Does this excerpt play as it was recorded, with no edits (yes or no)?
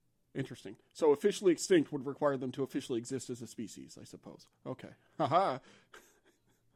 yes